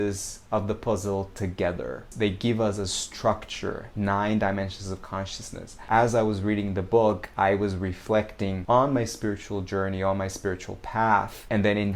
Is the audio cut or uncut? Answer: uncut